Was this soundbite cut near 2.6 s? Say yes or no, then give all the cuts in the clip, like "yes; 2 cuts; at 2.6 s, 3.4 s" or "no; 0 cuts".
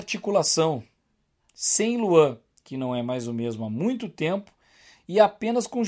no; 0 cuts